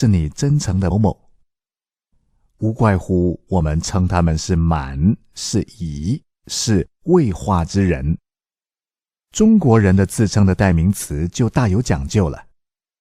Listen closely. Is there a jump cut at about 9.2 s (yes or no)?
no